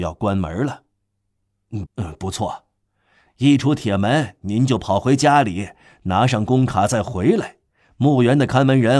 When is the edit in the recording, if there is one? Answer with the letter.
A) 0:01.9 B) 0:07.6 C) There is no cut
A